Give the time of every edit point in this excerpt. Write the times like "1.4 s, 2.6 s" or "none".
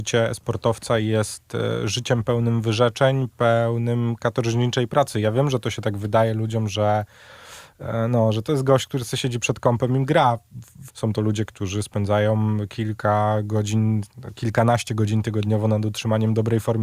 10.9 s